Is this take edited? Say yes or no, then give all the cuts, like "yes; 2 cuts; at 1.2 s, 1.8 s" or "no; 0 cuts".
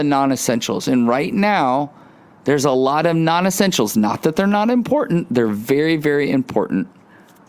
no; 0 cuts